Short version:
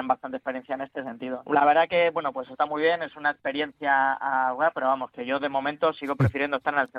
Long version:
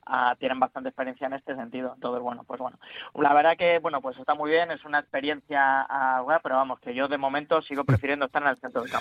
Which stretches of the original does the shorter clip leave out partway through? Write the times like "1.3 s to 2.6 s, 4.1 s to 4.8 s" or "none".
2.0 s to 3.1 s